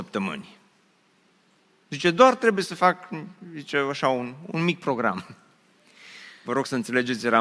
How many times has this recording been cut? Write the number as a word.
one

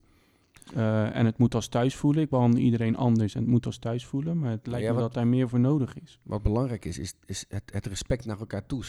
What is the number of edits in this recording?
zero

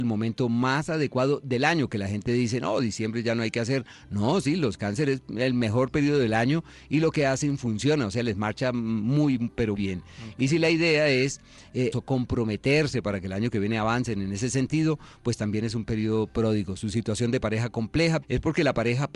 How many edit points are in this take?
three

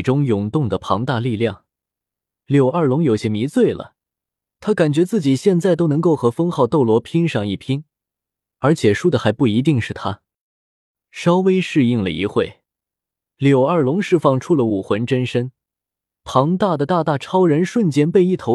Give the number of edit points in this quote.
zero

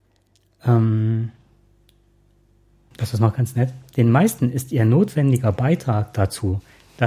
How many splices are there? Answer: one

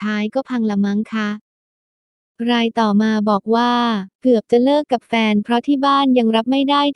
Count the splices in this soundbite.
one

